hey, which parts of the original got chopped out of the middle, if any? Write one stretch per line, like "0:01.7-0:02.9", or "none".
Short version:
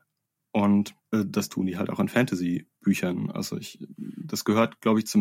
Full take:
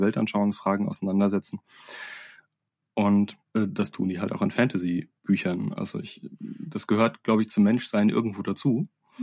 none